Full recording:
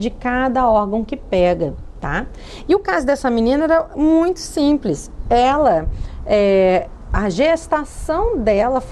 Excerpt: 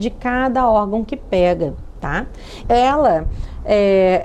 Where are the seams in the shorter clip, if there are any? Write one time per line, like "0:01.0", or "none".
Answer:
0:02.6